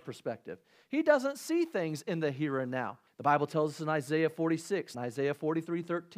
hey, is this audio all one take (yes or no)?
no